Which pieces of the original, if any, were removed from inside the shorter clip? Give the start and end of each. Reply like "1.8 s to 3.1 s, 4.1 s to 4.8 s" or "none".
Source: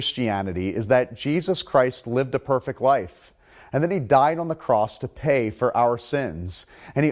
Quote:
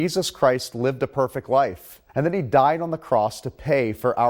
3.4 s to 3.7 s